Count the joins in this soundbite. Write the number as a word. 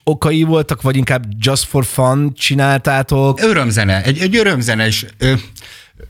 one